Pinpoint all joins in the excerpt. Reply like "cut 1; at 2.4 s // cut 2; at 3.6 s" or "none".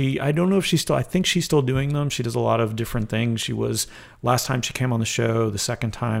none